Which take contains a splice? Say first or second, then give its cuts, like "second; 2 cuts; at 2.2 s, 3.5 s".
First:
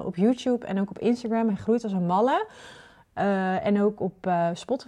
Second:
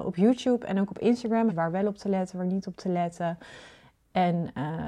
second; 1 cut; at 1.5 s